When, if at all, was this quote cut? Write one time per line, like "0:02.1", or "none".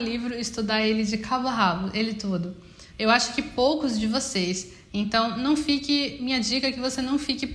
0:02.9
0:04.9